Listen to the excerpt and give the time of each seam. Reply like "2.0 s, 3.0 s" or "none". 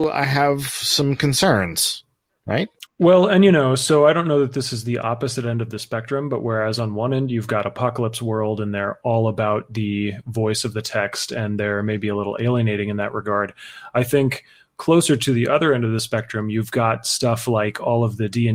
2.9 s